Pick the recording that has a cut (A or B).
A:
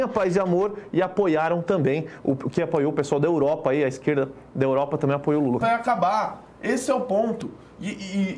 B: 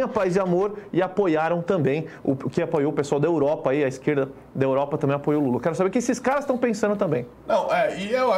A